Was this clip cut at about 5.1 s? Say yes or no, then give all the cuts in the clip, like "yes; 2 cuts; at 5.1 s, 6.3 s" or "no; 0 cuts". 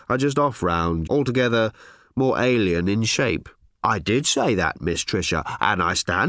no; 2 cuts; at 1.1 s, 3.8 s